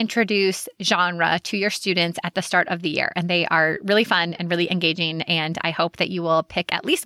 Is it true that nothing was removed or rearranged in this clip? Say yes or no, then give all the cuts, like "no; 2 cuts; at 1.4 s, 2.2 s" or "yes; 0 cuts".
yes; 0 cuts